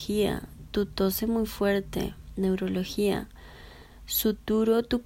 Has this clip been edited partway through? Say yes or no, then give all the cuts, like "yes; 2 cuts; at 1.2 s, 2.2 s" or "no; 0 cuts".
no; 0 cuts